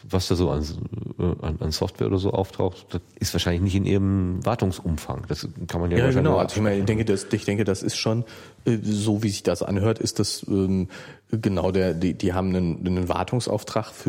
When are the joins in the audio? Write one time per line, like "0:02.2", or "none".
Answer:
none